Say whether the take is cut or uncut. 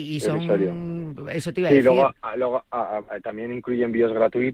cut